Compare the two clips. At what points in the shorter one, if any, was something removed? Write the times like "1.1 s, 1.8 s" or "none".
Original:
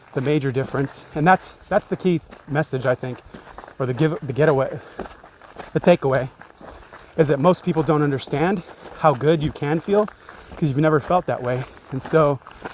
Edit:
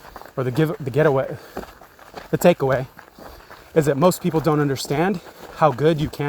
none